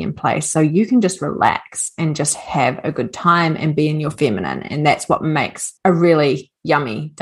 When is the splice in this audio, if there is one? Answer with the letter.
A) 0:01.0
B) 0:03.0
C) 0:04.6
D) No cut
D